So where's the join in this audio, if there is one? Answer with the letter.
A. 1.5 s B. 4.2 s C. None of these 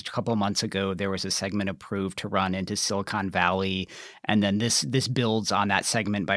C